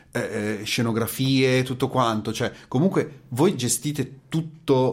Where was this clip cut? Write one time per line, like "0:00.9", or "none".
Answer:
none